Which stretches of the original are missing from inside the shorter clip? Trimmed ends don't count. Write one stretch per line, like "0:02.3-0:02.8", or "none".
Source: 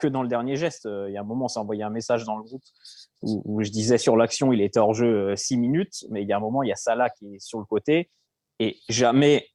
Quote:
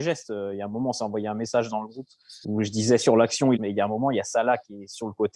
0:03.0-0:03.4
0:04.6-0:06.1

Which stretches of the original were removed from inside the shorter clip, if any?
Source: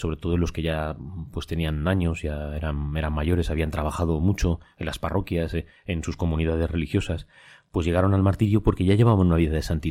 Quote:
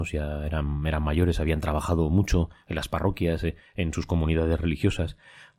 none

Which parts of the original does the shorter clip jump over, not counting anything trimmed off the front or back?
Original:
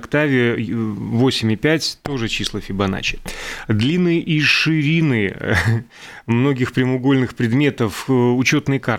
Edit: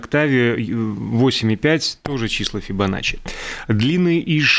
none

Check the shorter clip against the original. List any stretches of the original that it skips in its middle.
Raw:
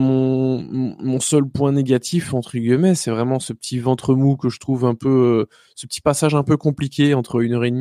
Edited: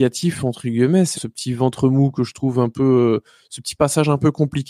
0:03.0-0:03.4

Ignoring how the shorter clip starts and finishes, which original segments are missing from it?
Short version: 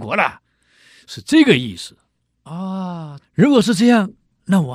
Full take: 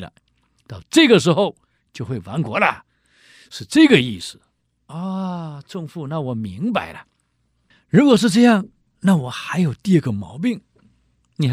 0:05.6-0:07.8

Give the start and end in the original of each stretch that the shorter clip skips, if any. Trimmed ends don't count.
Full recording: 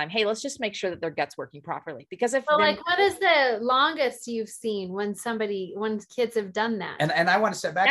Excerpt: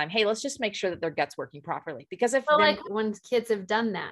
0:02.8-0:05.7

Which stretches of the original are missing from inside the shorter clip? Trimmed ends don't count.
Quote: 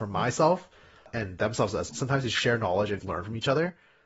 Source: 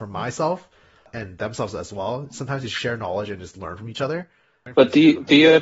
0:01.9-0:02.3
0:03.4-0:03.5

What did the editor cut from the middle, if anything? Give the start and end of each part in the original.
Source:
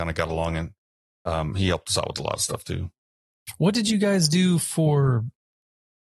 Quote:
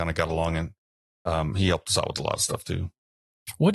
none

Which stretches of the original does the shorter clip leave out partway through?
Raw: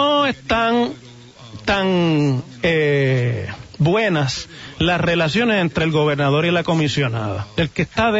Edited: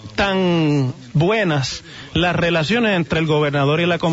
0:02.6-0:03.8

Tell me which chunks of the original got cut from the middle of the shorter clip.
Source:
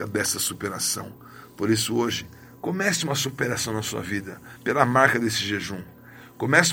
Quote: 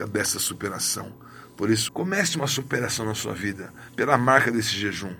0:01.9-0:02.6

